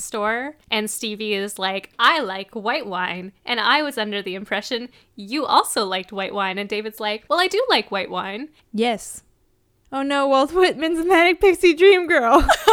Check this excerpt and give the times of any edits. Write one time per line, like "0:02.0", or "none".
0:07.3
0:08.6